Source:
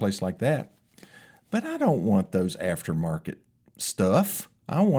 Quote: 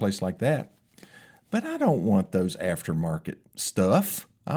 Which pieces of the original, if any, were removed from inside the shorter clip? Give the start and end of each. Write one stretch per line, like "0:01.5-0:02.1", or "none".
0:03.5-0:03.7